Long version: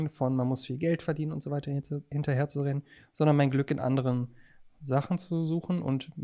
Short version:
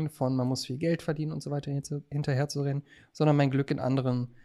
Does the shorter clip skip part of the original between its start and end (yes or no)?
no